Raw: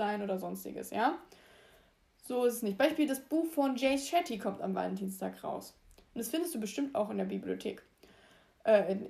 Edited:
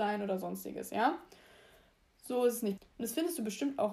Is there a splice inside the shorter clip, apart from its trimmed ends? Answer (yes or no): yes